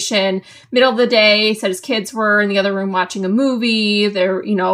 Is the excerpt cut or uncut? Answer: uncut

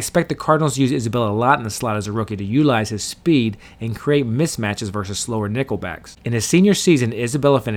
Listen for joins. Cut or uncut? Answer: cut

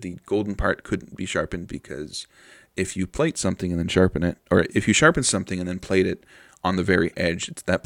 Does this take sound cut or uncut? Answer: uncut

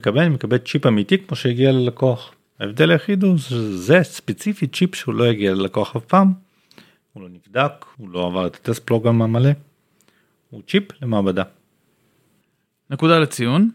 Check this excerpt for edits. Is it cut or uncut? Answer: cut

